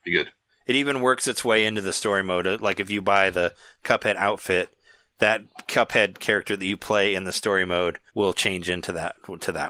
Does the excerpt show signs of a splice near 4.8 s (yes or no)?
no